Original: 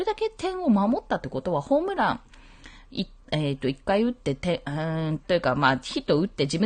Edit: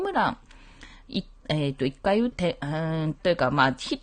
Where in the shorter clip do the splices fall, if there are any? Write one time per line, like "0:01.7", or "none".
0:02.3